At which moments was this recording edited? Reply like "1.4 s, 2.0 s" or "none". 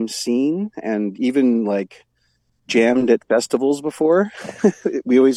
none